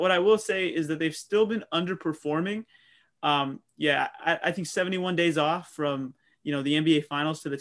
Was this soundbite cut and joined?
no; 0 cuts

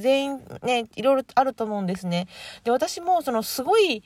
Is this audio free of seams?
yes; 0 cuts

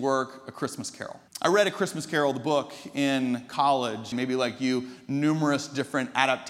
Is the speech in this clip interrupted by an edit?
yes; 2 cuts; at 1.3 s, 4.1 s

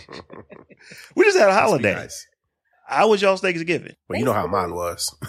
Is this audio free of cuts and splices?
no; 1 cut; at 3.9 s

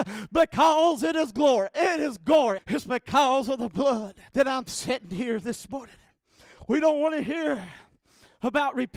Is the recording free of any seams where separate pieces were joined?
no; 2 cuts; at 2.6 s, 4.3 s

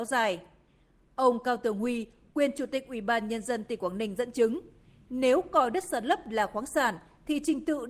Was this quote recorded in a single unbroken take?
yes; 0 cuts

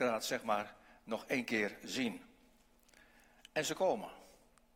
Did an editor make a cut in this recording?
no; 0 cuts

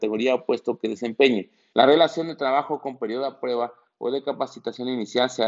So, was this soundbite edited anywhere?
yes; 1 cut; at 1.7 s

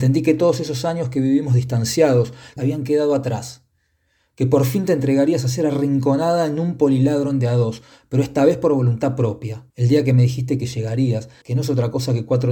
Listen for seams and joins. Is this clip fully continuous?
no; 3 cuts; at 2.6 s, 9.7 s, 11.4 s

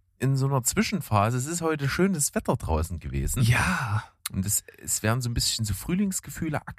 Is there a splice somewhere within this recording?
no; 0 cuts

